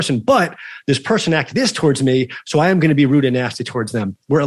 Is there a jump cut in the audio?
yes; 1 cut; at 1.5 s

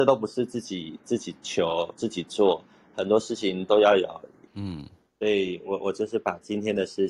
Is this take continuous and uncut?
no; 1 cut; at 4.5 s

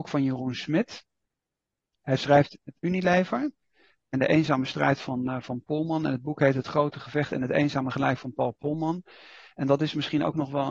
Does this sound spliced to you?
no; 0 cuts

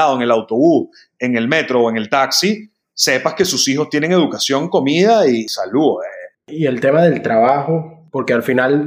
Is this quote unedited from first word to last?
no; 1 cut; at 6.3 s

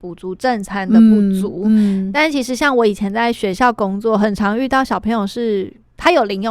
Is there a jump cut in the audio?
no; 0 cuts

